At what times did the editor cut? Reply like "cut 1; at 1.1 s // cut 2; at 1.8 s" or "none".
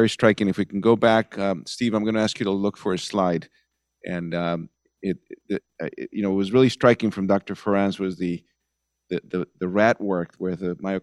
cut 1; at 5.6 s